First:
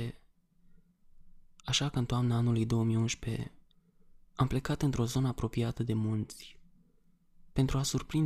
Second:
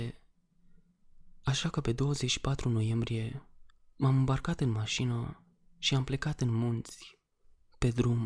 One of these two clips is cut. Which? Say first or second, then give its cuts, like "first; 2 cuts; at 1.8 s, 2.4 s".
second; 1 cut; at 1.4 s